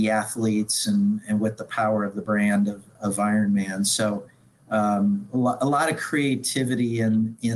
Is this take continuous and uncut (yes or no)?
yes